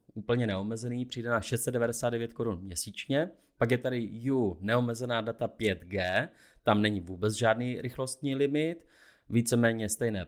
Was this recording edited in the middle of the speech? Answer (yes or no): no